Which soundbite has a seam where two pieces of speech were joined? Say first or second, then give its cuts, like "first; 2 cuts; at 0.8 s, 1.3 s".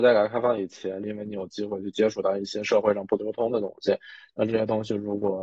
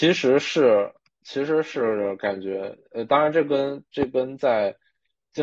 first; 1 cut; at 1.0 s